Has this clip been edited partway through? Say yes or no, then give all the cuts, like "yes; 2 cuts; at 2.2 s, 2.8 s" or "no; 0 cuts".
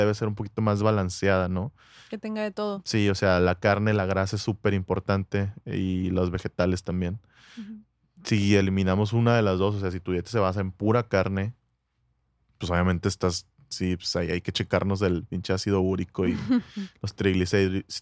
no; 0 cuts